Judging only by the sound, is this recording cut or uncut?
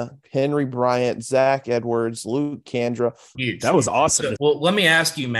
cut